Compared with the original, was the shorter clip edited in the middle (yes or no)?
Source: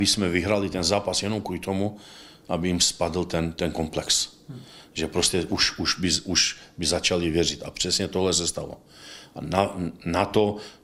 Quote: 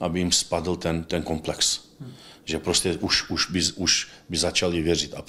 no